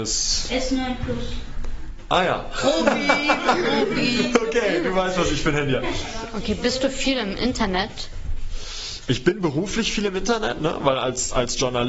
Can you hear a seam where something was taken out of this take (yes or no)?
no